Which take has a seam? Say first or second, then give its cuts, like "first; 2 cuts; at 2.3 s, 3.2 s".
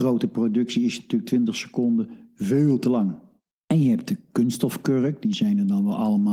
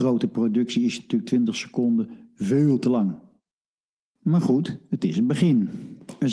first; 1 cut; at 3.6 s